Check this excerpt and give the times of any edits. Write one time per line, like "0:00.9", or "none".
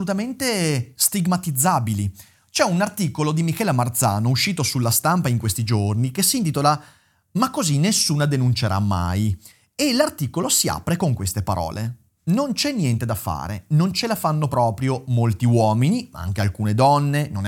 none

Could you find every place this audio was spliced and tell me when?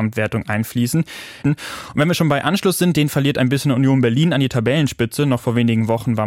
0:01.4

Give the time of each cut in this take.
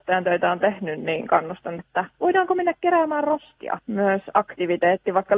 0:01.8
0:03.8

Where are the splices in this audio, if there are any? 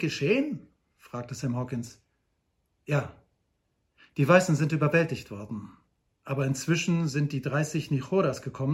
none

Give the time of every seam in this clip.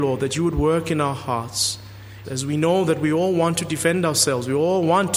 0:02.2

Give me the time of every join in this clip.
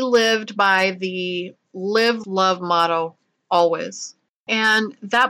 0:02.2

